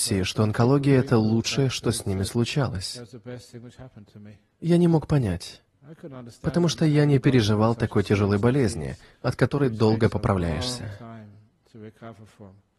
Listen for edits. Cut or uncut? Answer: uncut